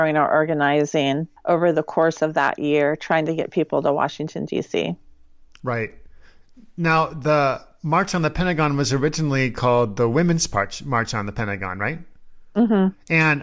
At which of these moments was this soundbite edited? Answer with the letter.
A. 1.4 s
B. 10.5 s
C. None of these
A